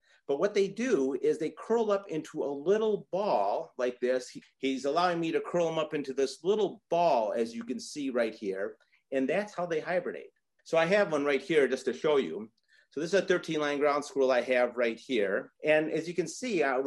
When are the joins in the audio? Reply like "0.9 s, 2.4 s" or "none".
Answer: 4.4 s, 10.6 s, 15.6 s